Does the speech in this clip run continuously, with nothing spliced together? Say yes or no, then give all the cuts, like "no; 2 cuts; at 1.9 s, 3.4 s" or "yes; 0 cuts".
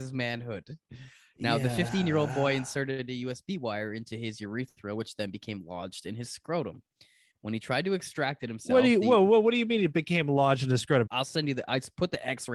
no; 1 cut; at 11.1 s